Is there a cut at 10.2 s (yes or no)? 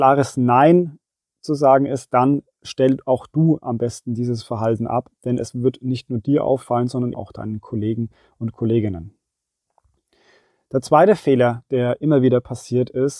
no